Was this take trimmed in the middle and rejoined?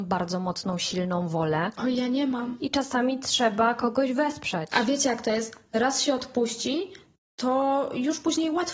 no; 0 cuts

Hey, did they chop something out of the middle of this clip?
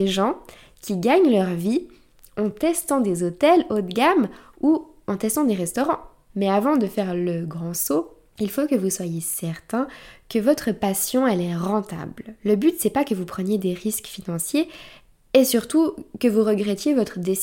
yes; 1 cut; at 6.3 s

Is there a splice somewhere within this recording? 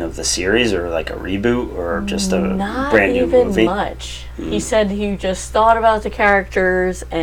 no; 0 cuts

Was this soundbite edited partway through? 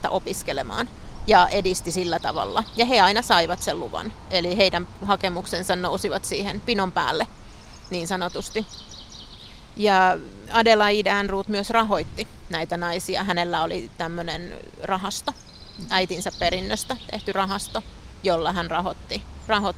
no; 0 cuts

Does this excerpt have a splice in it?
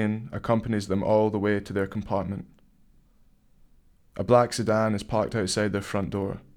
yes; 1 cut; at 4.0 s

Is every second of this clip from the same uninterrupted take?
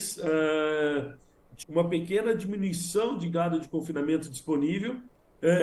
no; 1 cut; at 1.6 s

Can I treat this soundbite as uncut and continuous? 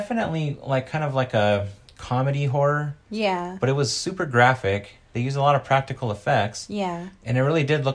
yes; 0 cuts

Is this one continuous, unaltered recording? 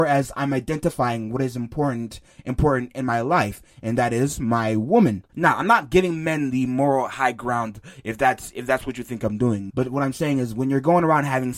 no; 1 cut; at 9.7 s

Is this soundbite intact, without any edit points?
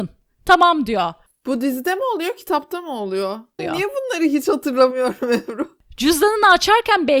no; 1 cut; at 3.6 s

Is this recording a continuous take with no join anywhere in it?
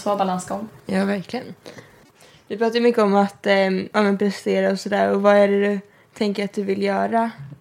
yes; 0 cuts

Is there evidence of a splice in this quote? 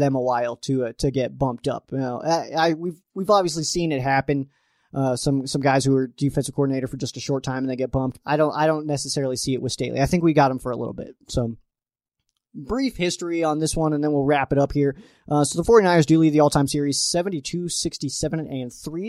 yes; 1 cut; at 8.2 s

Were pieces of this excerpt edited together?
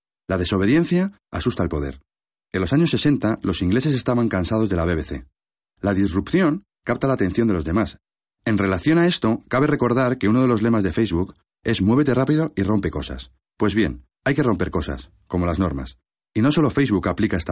yes; 3 cuts; at 2.3 s, 5.7 s, 14.1 s

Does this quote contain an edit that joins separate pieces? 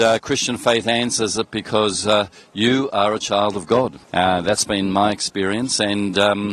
yes; 1 cut; at 4.0 s

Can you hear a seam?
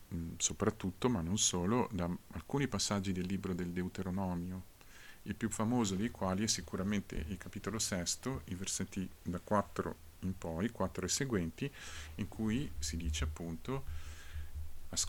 no; 0 cuts

